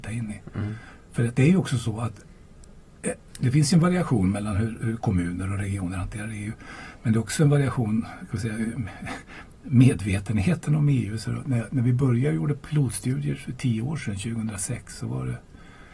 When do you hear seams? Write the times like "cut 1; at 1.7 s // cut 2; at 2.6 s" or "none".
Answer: none